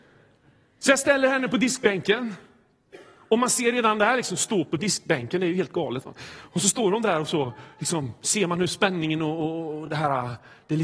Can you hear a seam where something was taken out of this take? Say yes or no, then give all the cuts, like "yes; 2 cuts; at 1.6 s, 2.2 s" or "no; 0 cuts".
no; 0 cuts